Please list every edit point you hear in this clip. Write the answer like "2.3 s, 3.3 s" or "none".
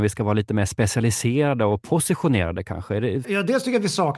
3.2 s